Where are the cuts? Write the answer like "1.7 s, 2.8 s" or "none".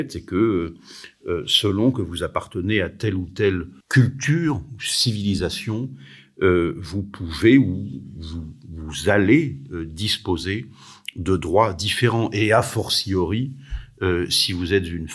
3.8 s

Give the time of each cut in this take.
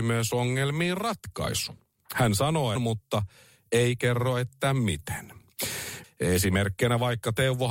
2.8 s, 6.0 s

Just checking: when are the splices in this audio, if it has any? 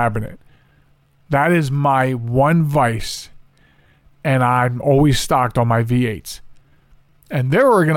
none

